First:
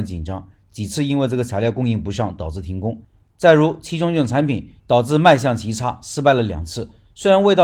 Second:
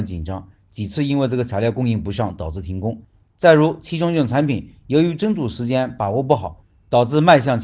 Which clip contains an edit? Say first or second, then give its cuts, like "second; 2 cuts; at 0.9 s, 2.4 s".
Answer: first; 1 cut; at 4.8 s